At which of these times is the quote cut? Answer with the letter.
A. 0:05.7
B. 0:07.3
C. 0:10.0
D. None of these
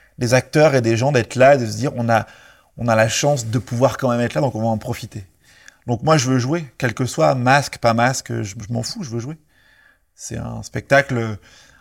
D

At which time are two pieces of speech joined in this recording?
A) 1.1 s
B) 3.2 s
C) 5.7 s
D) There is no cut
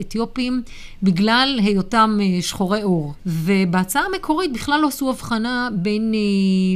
B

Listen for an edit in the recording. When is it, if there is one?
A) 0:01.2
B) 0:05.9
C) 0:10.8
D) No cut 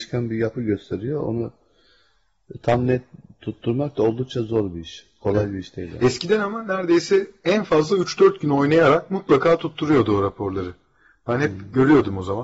D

